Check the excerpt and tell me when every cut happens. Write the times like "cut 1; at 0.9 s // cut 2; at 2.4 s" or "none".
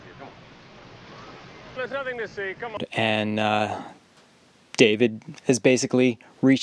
cut 1; at 1.8 s